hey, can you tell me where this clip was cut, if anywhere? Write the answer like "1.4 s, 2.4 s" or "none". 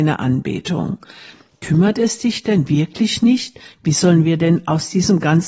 none